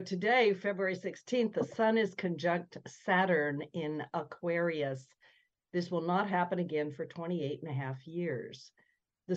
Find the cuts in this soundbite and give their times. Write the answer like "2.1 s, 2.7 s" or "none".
none